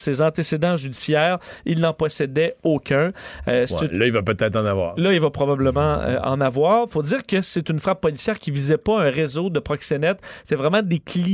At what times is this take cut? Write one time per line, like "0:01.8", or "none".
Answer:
none